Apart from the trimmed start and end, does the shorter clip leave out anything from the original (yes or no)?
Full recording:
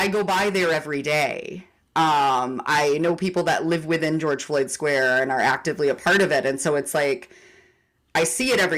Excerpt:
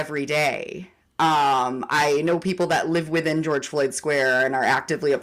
no